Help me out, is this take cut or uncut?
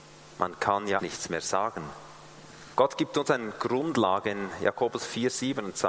cut